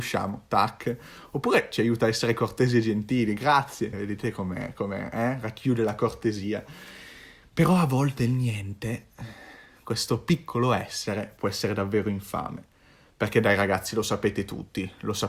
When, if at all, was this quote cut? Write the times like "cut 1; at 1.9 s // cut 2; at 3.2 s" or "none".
cut 1; at 3.9 s